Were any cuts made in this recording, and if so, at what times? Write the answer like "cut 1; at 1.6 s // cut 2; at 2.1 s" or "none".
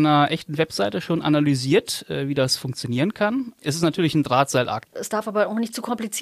cut 1; at 4.9 s